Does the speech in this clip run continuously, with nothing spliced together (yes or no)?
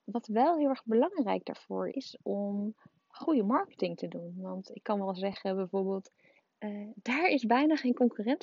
no